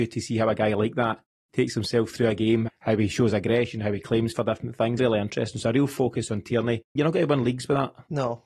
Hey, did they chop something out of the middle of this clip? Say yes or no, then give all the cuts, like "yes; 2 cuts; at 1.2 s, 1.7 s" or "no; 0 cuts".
yes; 3 cuts; at 2.7 s, 5.0 s, 7.0 s